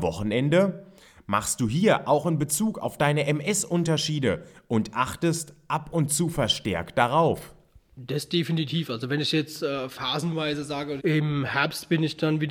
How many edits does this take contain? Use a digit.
1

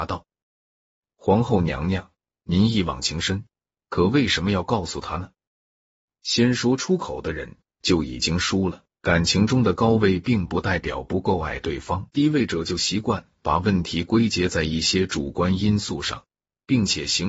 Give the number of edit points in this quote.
2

